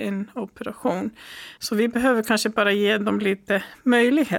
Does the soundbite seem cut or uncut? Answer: cut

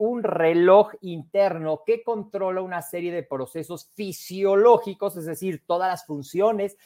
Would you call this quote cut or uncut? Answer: uncut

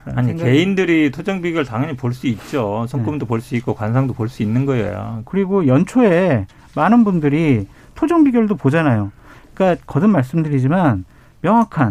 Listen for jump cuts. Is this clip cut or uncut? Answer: cut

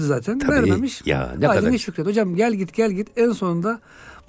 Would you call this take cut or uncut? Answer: uncut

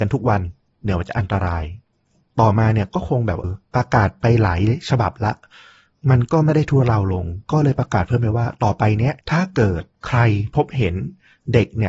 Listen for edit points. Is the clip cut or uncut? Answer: cut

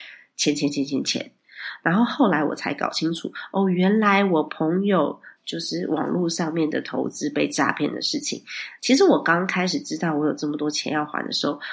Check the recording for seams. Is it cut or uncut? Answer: cut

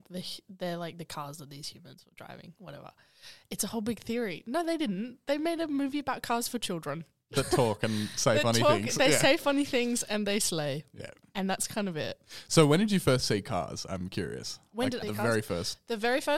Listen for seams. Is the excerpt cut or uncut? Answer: cut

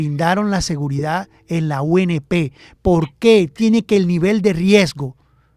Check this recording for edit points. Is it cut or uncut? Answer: uncut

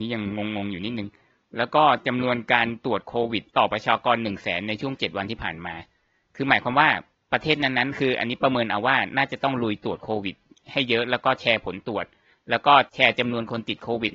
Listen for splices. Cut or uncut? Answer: cut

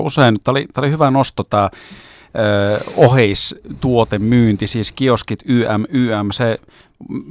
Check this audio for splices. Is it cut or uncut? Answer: uncut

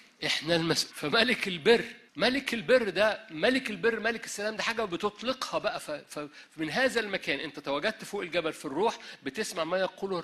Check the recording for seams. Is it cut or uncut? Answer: cut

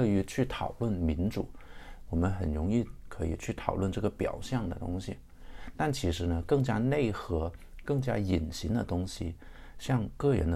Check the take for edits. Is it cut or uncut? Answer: cut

